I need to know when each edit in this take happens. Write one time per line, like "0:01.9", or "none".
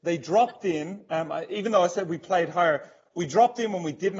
none